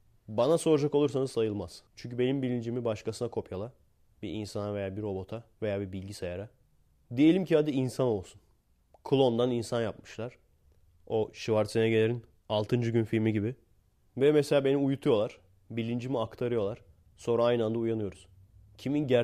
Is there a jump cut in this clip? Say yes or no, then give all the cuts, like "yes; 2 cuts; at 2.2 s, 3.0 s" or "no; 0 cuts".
yes; 2 cuts; at 1.9 s, 5.5 s